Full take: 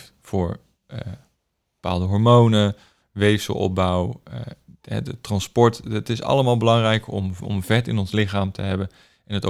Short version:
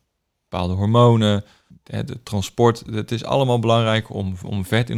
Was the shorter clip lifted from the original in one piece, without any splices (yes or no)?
no